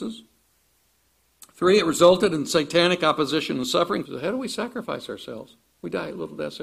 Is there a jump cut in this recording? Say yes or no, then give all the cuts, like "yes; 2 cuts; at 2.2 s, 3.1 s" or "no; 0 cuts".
yes; 1 cut; at 4.1 s